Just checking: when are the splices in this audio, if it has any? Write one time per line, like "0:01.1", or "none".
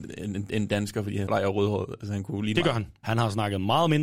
0:01.3
0:03.0